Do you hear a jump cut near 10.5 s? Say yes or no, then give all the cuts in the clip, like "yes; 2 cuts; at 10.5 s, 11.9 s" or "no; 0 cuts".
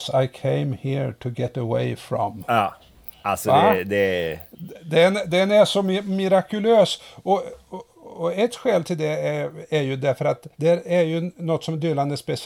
yes; 1 cut; at 10.5 s